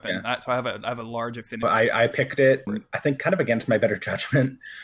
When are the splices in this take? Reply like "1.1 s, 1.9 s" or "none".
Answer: 1.6 s, 2.7 s